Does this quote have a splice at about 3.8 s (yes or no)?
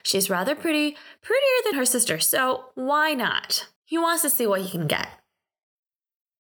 yes